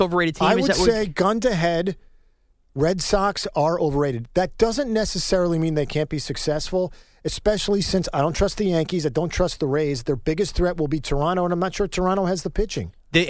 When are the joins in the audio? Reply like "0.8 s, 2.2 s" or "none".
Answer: none